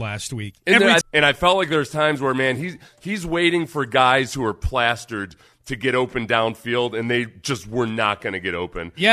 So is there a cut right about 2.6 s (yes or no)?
no